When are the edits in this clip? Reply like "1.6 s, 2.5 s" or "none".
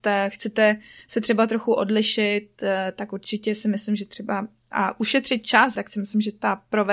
5.8 s